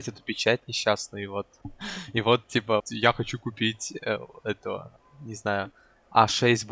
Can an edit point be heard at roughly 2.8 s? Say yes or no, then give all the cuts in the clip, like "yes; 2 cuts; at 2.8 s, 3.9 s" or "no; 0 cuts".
yes; 1 cut; at 2.8 s